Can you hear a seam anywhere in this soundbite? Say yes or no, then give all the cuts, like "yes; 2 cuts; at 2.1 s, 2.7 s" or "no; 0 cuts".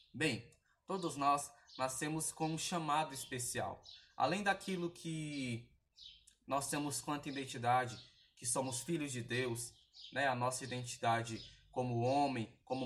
no; 0 cuts